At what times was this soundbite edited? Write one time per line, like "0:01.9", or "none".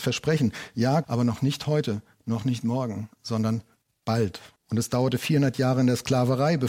0:01.0
0:04.6